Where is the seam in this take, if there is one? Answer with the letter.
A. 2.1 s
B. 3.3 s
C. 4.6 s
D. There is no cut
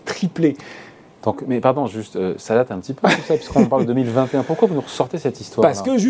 D